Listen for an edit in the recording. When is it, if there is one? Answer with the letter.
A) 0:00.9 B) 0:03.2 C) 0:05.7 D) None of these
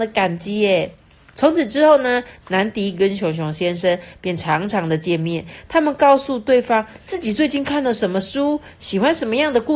D